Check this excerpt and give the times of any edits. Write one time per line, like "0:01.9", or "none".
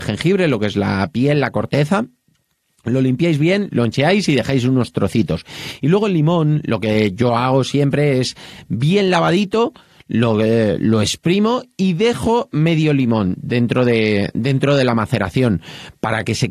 none